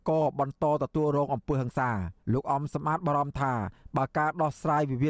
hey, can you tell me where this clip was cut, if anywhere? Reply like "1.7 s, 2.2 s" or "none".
2.2 s